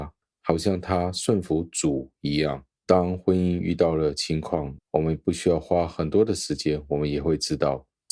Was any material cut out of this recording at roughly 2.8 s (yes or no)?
yes